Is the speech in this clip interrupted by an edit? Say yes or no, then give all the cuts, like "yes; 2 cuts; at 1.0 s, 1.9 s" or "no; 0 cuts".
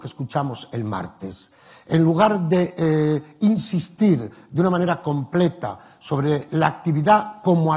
yes; 1 cut; at 6.5 s